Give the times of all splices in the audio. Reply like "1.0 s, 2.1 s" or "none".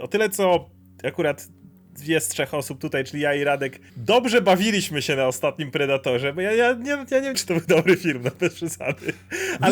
3.9 s, 7.3 s